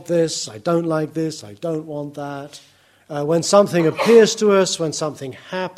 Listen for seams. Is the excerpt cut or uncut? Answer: cut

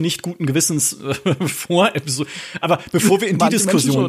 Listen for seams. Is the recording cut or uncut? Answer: uncut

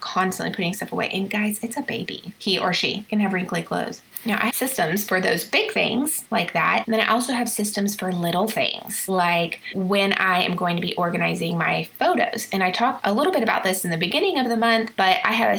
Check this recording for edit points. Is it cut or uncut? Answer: uncut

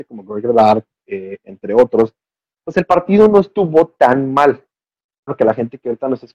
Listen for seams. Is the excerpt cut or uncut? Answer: cut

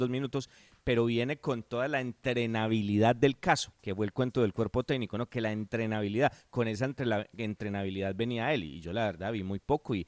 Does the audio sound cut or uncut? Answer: cut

